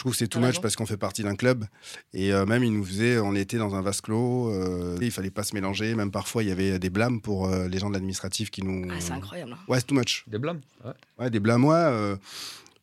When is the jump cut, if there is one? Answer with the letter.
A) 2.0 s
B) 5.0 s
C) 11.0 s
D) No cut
B